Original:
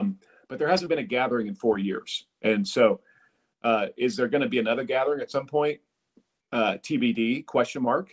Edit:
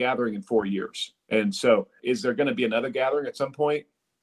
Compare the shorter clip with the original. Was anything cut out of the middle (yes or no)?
yes